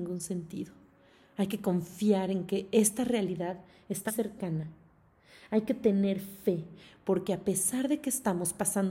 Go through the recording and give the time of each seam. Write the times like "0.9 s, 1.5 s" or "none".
4.1 s